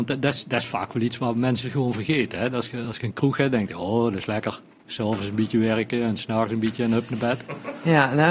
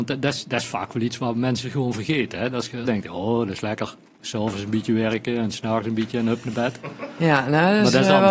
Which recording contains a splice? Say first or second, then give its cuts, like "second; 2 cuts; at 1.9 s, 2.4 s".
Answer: second; 1 cut; at 2.8 s